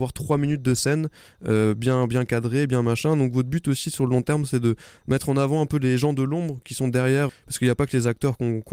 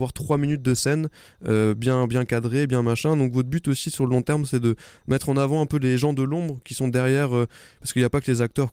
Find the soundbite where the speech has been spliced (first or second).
first